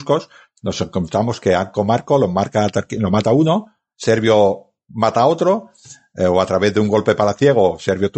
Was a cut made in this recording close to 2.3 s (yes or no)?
no